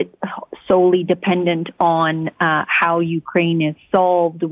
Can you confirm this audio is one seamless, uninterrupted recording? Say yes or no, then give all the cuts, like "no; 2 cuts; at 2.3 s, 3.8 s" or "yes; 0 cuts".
yes; 0 cuts